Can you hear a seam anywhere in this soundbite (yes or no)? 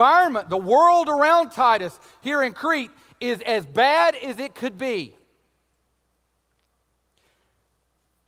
no